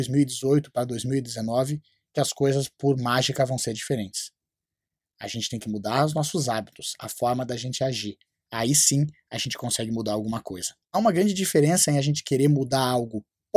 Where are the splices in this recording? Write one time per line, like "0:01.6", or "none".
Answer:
0:07.0
0:10.8